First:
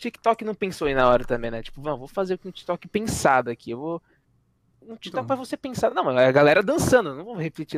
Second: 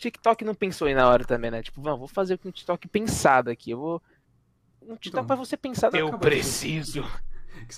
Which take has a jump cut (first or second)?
second